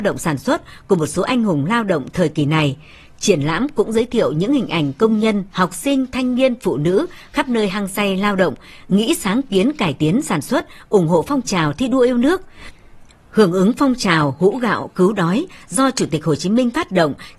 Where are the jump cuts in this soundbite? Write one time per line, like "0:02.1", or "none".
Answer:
0:05.5
0:13.1